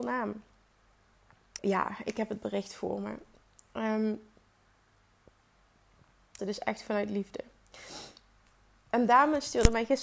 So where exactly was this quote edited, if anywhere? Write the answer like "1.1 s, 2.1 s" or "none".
1.6 s, 6.4 s